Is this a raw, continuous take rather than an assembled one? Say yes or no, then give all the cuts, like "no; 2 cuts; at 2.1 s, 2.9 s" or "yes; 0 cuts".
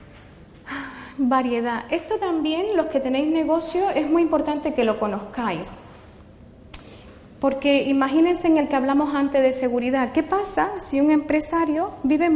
yes; 0 cuts